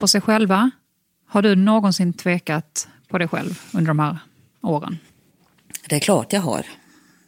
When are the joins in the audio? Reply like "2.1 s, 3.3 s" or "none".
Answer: none

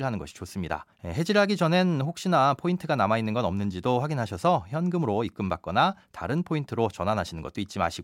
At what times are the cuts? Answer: 0.9 s

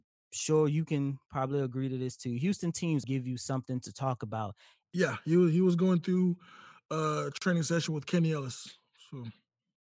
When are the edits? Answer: 3.0 s, 4.8 s

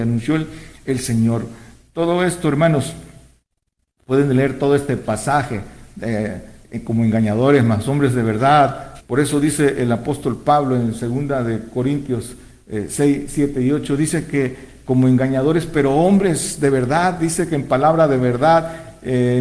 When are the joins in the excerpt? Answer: 9.0 s

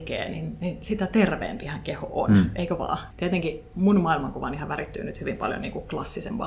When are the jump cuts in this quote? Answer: 3.1 s

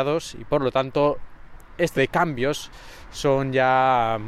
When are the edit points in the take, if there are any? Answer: 2.0 s

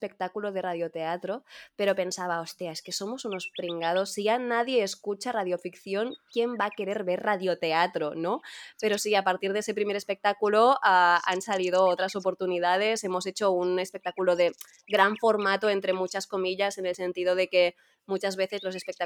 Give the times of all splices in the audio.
8.7 s

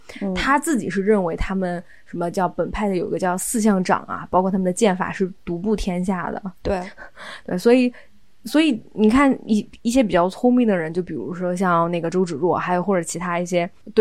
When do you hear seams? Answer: none

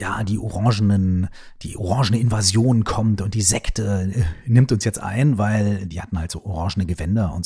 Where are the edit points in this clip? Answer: none

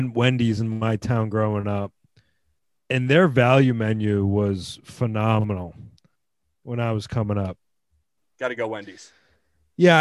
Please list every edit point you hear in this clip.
8.2 s

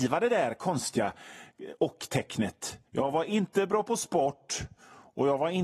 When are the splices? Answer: 2.9 s

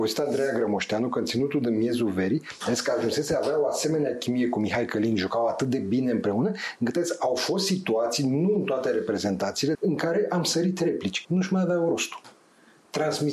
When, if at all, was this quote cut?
9.7 s, 11.2 s

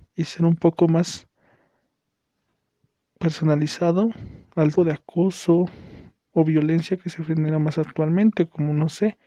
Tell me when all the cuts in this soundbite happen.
4.8 s

